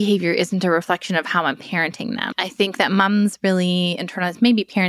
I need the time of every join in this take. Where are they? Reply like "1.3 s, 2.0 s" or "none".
2.3 s